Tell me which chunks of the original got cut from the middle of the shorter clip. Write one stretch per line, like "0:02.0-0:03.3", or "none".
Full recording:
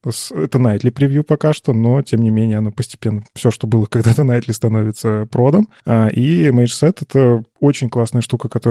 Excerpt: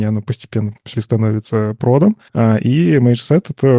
0:03.4-0:04.5